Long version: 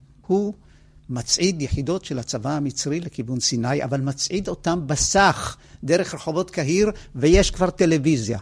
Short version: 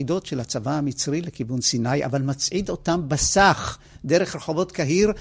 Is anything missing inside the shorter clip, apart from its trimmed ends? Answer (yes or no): no